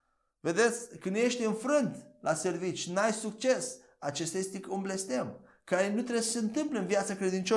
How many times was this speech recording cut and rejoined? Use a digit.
0